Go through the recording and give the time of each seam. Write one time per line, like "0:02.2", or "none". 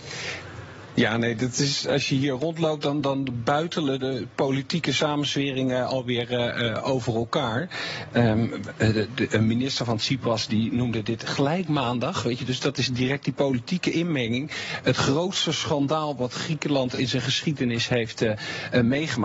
none